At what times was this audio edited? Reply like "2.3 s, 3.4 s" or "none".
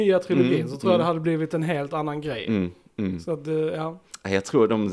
none